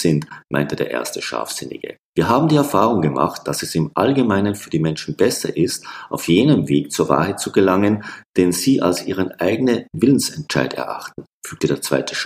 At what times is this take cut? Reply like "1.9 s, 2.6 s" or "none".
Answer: 2.1 s